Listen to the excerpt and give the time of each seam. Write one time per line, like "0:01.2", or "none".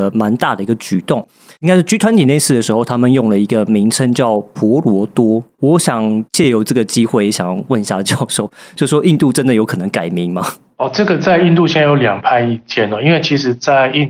0:01.6